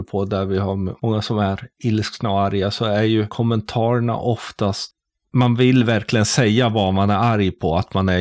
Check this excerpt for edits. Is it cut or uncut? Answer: cut